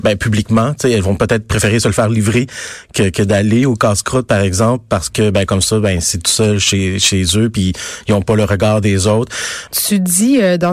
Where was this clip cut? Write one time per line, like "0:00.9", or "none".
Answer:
0:09.7